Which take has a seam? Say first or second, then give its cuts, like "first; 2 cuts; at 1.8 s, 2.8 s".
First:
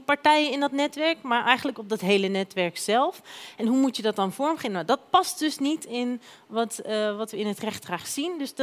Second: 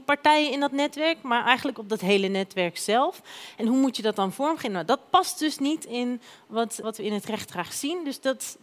second; 1 cut; at 6.8 s